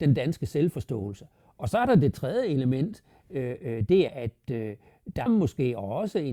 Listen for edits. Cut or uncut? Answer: cut